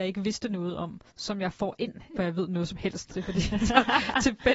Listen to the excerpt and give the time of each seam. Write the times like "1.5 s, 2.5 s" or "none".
1.1 s, 2.2 s